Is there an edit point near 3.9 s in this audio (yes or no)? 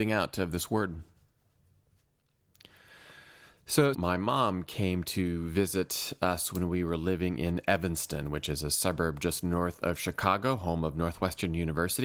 yes